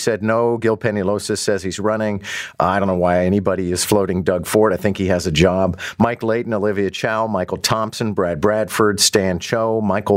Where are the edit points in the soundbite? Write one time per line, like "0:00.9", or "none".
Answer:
none